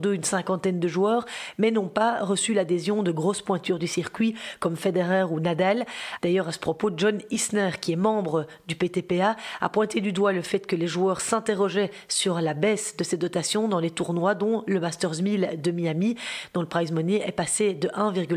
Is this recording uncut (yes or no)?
no